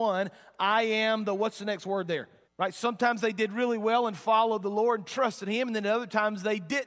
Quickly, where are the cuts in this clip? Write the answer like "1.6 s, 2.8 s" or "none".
2.4 s